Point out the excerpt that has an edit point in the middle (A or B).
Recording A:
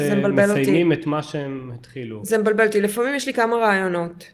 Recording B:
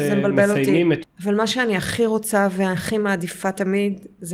B